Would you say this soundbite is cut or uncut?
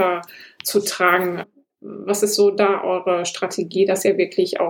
cut